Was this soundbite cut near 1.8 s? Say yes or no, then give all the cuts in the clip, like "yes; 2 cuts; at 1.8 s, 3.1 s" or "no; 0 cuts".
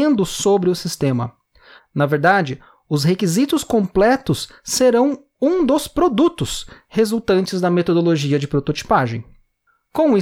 yes; 1 cut; at 1.8 s